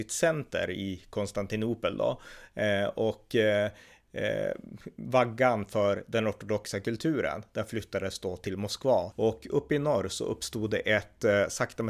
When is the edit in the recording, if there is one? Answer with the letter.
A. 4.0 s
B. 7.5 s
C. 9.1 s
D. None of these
C